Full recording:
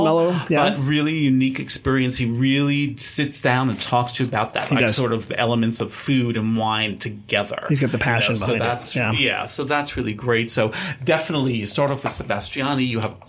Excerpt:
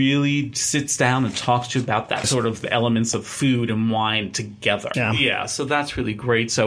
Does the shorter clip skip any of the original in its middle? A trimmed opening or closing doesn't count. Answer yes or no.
yes